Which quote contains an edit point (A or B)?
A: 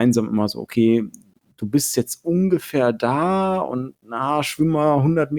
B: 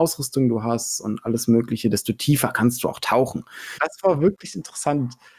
B